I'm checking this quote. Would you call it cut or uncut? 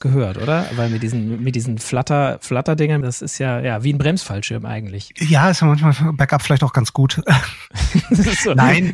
cut